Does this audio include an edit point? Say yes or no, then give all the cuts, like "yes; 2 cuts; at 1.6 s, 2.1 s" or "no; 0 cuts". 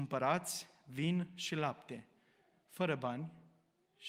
no; 0 cuts